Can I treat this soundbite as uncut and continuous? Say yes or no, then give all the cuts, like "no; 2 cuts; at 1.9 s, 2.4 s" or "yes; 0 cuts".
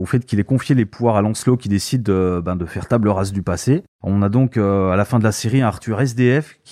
no; 1 cut; at 3.9 s